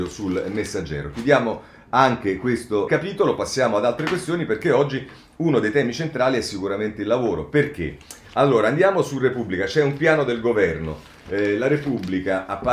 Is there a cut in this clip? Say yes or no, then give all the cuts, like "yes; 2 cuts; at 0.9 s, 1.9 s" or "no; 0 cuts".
yes; 1 cut; at 2.9 s